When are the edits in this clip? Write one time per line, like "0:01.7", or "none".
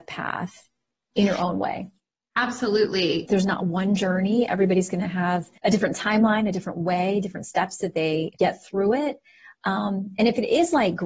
0:03.3
0:05.6
0:08.3